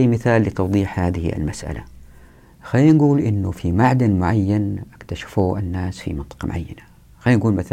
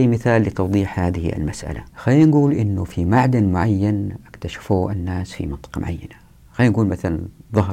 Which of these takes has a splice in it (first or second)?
second